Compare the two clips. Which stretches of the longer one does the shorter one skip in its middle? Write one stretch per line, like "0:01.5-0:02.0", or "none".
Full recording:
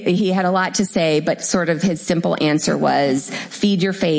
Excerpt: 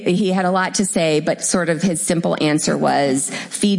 none